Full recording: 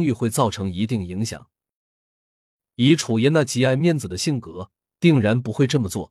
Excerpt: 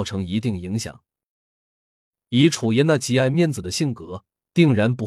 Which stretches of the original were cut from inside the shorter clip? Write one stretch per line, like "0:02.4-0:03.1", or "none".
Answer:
none